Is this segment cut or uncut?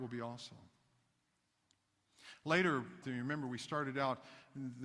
cut